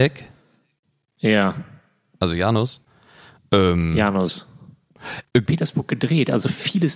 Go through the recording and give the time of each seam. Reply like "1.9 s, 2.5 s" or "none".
5.5 s